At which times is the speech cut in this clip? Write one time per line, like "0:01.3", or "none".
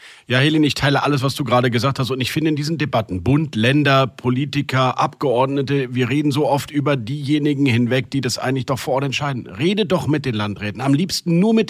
none